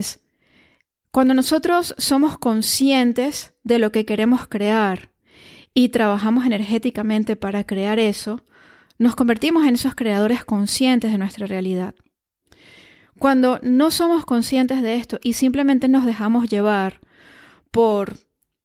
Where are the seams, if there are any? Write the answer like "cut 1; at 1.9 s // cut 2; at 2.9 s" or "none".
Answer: none